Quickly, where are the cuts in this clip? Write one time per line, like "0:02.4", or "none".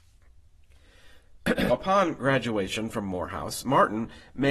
0:01.7